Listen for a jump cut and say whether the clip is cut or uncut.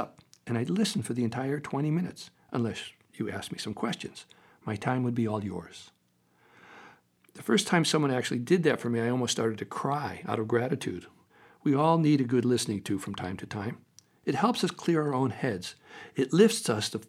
uncut